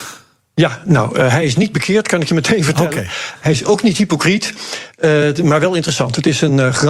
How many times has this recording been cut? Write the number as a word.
zero